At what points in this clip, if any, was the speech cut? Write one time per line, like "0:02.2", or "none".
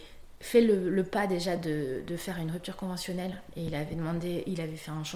none